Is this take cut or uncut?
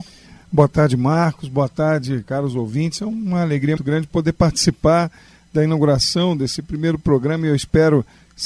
cut